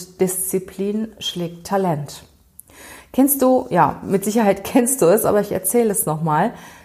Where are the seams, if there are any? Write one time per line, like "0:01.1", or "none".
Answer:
none

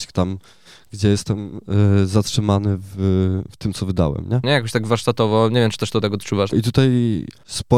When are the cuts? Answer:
0:04.4
0:06.5

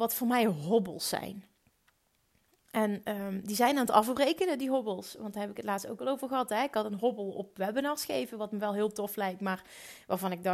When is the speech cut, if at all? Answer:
none

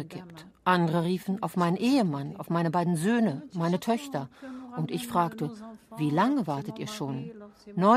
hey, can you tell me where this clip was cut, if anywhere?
none

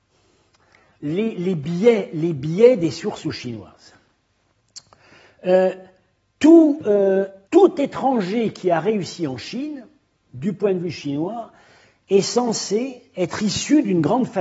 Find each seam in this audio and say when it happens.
0:07.4

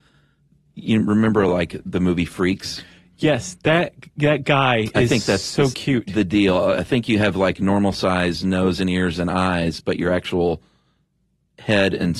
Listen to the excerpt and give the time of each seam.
none

